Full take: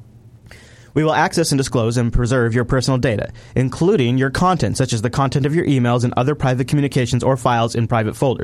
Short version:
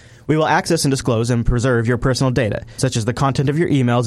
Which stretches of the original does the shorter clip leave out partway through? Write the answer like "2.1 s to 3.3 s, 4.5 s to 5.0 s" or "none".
3.5 s to 4.7 s